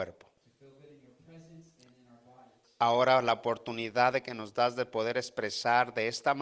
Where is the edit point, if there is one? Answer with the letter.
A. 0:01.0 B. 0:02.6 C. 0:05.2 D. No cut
B